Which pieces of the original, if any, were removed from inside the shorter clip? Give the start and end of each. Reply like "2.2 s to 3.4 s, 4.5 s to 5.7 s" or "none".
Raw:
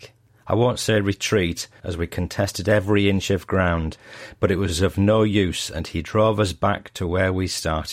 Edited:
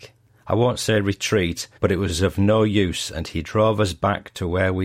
1.8 s to 4.4 s